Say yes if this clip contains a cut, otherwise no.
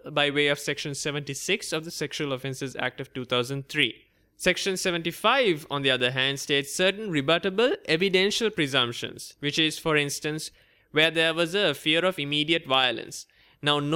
no